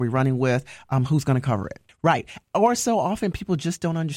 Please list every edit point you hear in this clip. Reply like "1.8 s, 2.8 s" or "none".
1.9 s